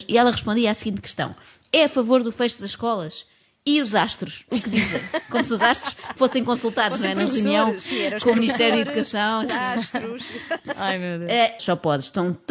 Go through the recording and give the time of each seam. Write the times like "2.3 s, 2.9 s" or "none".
9.5 s, 11.6 s